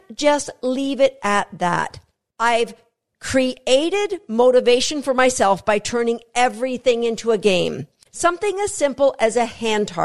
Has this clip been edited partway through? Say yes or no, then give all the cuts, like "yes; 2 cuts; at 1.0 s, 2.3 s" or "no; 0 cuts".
yes; 2 cuts; at 2.3 s, 8.1 s